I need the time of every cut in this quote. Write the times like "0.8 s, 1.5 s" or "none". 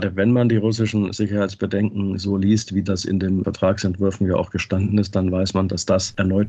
none